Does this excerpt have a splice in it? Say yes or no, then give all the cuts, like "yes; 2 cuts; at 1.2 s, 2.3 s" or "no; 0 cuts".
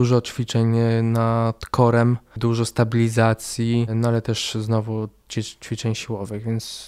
no; 0 cuts